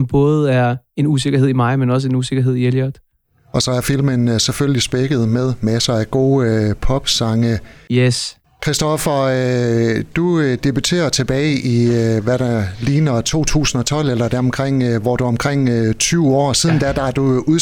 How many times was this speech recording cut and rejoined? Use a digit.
0